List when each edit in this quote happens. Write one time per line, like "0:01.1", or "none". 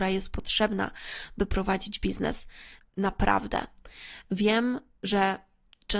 0:02.8